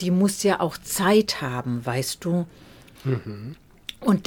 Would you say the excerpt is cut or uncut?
cut